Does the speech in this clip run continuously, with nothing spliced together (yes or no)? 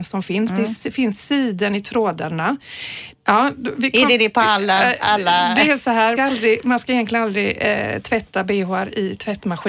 no